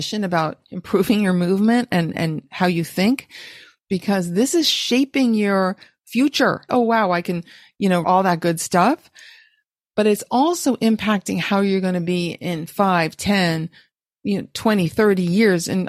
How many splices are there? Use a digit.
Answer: 2